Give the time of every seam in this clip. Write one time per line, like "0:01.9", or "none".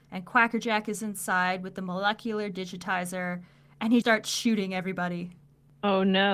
0:04.0